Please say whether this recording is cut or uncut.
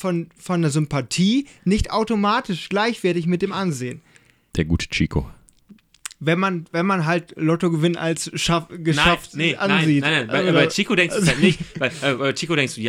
cut